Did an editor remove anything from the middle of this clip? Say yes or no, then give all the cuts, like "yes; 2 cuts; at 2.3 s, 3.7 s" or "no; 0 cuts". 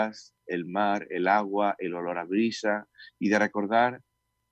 no; 0 cuts